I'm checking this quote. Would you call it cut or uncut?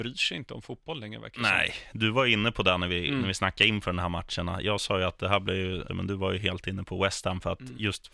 cut